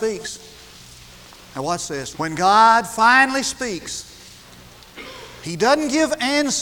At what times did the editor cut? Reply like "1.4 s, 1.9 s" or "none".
2.1 s